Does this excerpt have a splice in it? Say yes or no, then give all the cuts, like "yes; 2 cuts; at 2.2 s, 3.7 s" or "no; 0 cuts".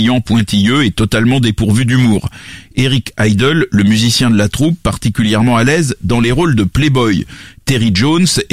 no; 0 cuts